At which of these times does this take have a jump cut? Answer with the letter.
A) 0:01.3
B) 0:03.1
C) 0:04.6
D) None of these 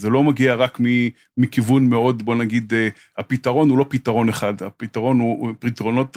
D